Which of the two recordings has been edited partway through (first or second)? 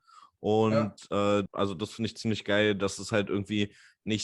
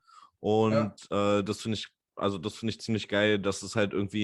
first